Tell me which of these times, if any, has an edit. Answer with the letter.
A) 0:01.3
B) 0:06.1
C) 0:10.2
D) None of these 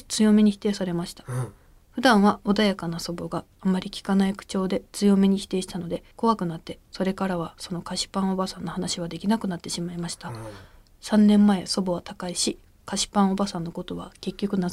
B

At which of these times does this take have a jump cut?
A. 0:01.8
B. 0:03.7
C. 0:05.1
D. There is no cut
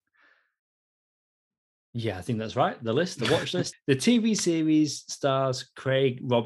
B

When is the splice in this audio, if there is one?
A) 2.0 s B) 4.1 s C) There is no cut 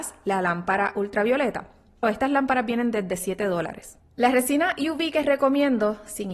A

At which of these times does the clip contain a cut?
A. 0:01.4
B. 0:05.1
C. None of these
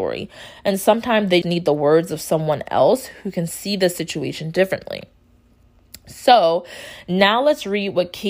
A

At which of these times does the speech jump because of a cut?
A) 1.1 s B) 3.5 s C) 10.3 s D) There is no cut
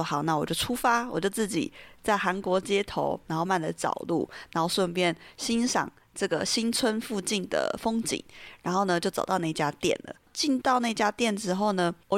B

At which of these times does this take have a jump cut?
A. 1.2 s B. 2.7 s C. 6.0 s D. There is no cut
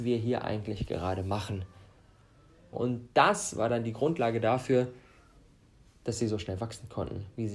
B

